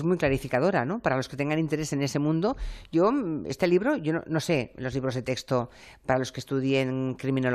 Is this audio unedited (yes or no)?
yes